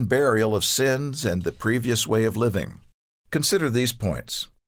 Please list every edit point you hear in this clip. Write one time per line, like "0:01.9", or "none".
0:03.2